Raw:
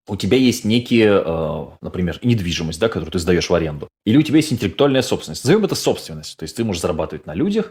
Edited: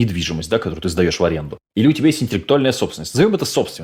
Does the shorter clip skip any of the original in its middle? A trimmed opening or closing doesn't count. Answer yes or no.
no